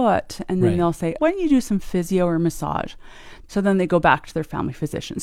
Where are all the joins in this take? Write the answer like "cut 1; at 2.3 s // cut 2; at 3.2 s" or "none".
cut 1; at 1.2 s // cut 2; at 3.5 s

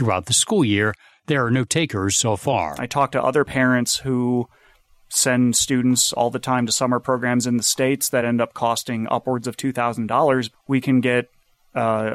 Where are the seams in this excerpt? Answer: cut 1; at 2.8 s // cut 2; at 10.5 s

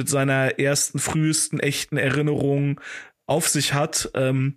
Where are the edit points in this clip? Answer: none

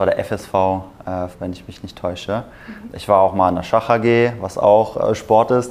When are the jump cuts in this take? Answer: cut 1; at 1.3 s // cut 2; at 2.8 s

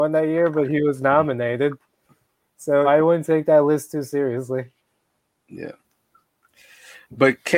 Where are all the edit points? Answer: cut 1; at 2.8 s

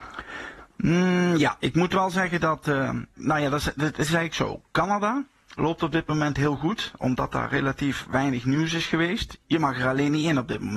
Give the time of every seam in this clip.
none

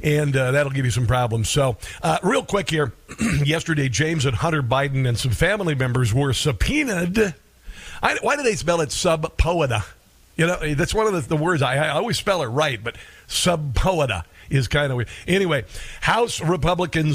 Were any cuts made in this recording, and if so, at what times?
none

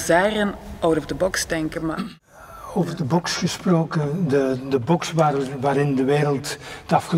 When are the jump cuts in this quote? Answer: none

